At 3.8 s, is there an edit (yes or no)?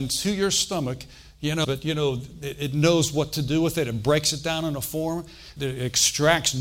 no